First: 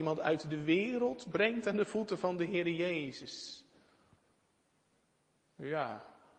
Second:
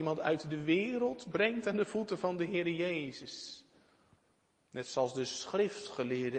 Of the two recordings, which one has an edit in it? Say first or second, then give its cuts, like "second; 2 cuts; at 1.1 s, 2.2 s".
second; 1 cut; at 4.6 s